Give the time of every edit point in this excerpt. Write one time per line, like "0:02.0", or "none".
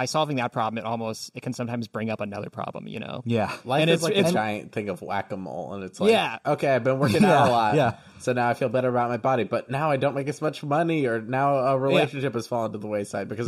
none